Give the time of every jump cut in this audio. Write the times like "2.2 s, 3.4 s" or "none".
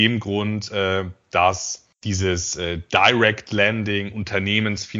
1.9 s